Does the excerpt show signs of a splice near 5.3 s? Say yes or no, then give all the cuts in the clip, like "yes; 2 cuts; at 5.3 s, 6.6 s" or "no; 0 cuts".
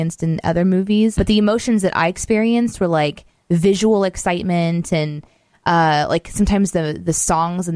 no; 1 cut; at 1.2 s